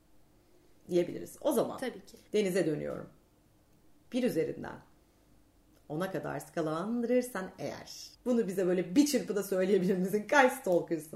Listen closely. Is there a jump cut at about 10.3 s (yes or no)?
no